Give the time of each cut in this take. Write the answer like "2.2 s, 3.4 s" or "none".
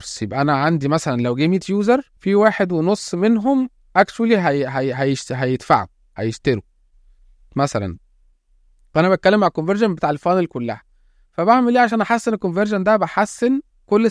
2.2 s